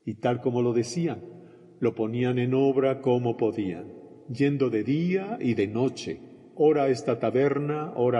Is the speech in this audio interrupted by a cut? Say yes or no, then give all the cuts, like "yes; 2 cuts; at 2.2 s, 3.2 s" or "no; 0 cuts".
no; 0 cuts